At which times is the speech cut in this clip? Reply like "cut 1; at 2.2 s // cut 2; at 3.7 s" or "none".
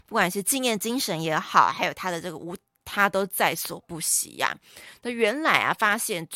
cut 1; at 2.8 s